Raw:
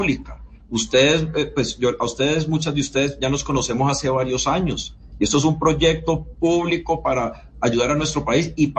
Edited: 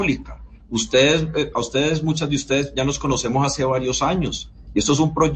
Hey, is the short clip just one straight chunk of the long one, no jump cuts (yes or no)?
no